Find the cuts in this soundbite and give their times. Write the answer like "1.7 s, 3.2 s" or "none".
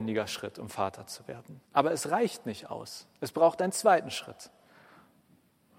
1.6 s

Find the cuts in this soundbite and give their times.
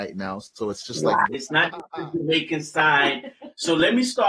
1.3 s

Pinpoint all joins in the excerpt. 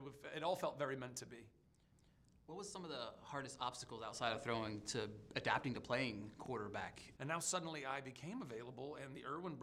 7.2 s

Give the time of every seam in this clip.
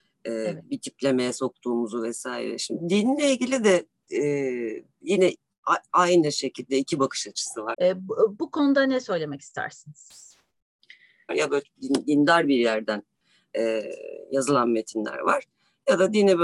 7.7 s, 11.3 s

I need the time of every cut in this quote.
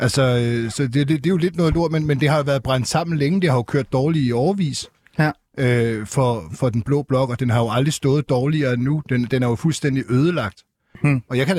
none

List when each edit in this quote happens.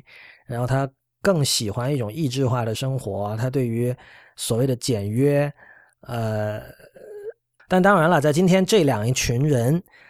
7.6 s

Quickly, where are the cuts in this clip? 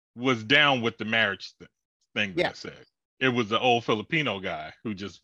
none

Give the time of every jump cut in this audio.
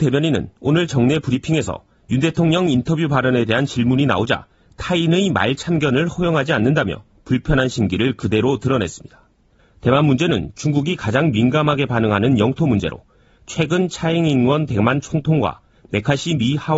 9.6 s

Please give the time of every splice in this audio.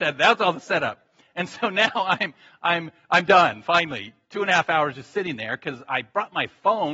none

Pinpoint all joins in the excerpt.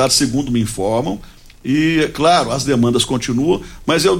none

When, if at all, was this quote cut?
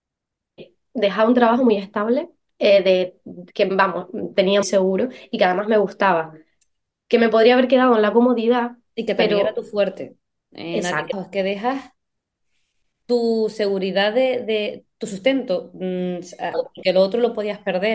4.6 s, 11.1 s, 16.5 s

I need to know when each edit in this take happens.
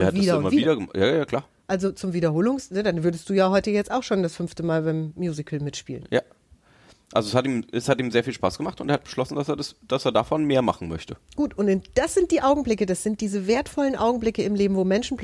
none

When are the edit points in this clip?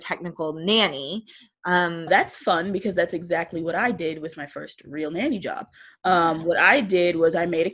2.1 s

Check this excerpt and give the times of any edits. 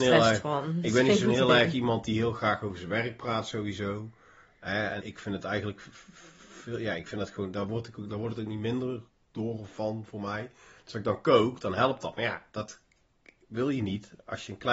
5.0 s

